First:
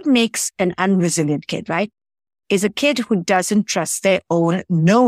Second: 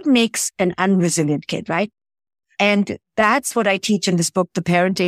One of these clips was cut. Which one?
second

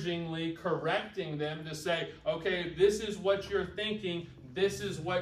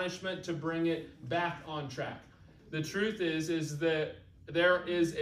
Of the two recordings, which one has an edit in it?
second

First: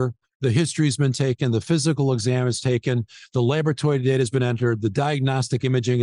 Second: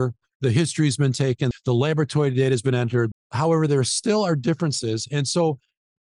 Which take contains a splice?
second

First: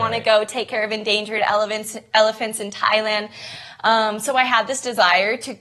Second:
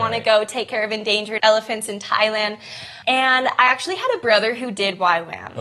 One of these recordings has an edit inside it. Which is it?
second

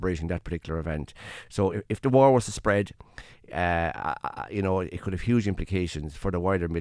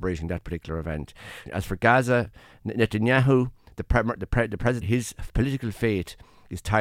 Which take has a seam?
second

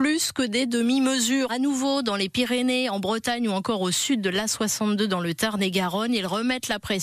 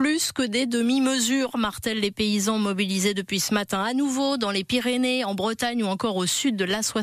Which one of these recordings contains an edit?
first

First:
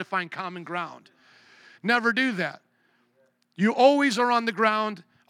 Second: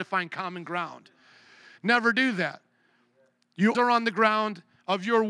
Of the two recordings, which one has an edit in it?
second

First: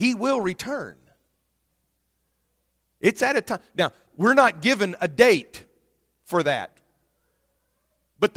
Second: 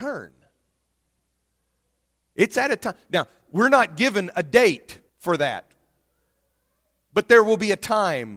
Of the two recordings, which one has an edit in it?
second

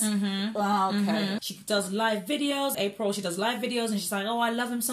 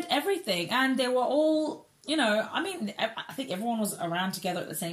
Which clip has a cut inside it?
first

